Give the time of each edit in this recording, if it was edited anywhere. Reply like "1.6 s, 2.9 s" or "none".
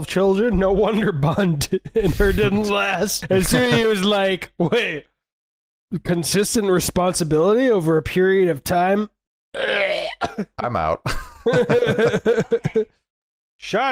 none